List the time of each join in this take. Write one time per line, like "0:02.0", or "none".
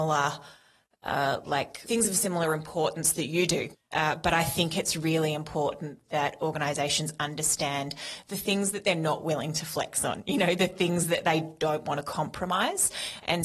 0:03.7